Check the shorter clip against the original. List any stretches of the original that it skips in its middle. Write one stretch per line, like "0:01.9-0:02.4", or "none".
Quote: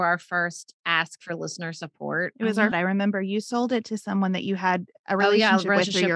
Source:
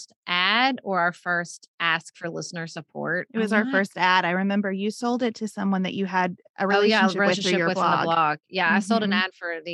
0:03.7-0:04.2